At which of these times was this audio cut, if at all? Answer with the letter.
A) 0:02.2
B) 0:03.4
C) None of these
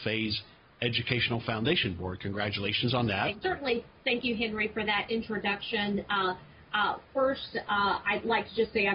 B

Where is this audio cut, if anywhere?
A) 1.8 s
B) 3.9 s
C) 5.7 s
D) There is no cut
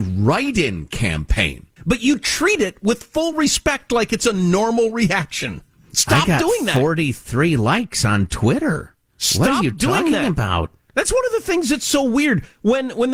A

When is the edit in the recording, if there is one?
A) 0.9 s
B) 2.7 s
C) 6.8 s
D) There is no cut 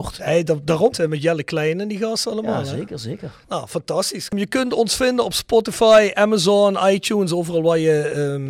A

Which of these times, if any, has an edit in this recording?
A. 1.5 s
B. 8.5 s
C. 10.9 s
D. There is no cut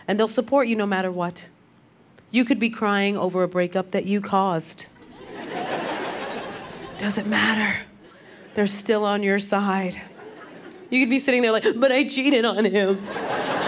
D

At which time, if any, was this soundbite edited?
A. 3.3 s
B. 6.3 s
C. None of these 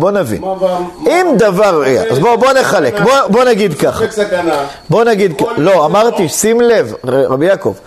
A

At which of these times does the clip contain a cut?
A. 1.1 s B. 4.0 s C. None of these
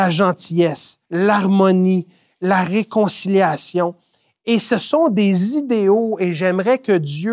A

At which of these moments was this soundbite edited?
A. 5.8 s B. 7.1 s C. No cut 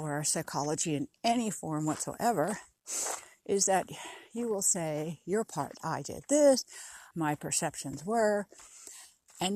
B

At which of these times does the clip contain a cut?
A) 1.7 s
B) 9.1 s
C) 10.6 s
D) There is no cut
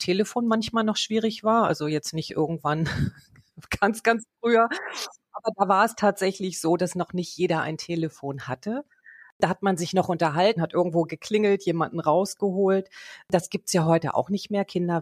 C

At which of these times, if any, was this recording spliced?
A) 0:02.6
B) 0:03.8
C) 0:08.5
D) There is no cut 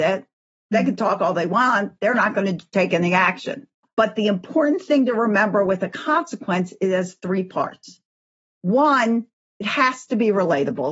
B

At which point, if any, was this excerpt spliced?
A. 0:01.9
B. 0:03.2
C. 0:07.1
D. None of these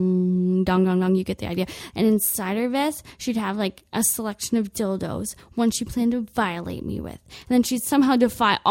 A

